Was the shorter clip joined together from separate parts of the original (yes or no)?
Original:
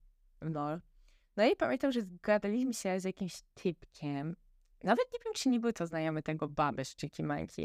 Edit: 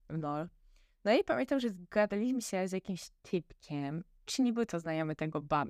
yes